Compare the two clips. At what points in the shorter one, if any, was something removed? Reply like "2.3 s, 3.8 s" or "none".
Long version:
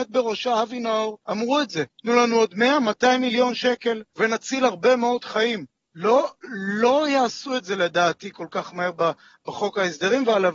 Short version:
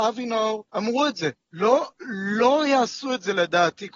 1.4 s